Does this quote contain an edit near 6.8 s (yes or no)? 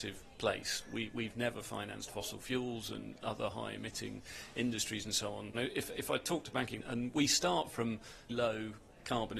yes